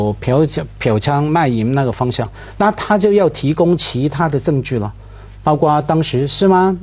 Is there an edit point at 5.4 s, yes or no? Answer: no